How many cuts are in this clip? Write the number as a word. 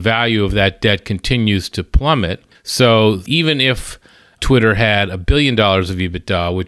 one